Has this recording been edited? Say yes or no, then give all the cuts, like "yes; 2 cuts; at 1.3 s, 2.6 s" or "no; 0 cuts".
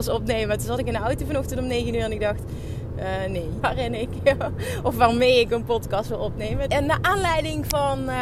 yes; 2 cuts; at 3.6 s, 6.7 s